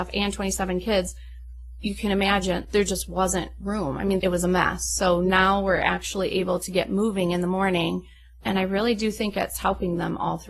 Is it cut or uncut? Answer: uncut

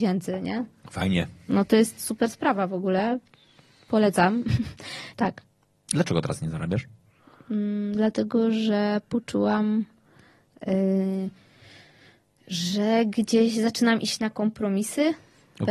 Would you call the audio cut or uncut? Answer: cut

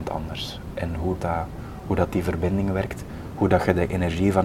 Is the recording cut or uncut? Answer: cut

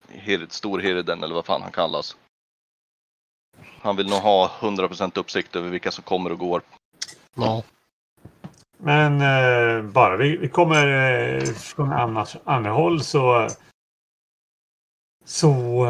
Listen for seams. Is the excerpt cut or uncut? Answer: uncut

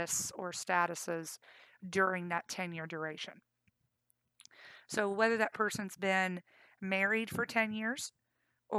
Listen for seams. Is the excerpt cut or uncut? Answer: uncut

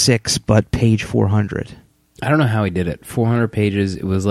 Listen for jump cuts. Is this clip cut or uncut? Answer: uncut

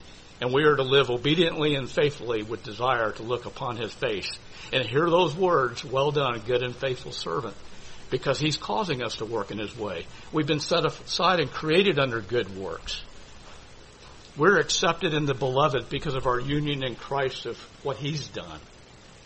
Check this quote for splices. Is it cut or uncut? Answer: uncut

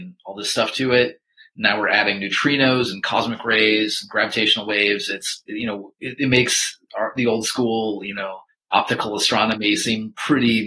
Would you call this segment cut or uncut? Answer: uncut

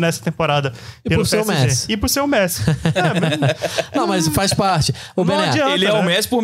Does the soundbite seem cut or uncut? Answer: uncut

